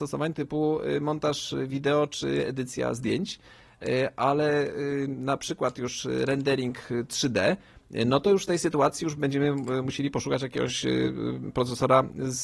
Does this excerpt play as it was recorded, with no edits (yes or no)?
no